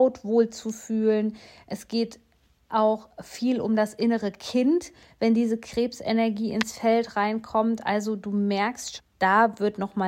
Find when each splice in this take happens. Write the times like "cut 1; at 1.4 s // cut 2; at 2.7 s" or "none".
cut 1; at 9.0 s